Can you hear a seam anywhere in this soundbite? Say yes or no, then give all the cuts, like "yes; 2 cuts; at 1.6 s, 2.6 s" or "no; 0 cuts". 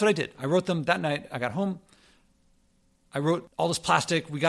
no; 0 cuts